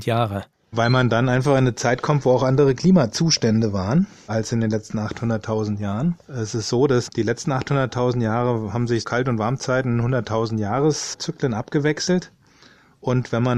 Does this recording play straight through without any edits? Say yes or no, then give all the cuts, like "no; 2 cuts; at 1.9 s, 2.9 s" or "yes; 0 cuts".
no; 2 cuts; at 6.2 s, 9.0 s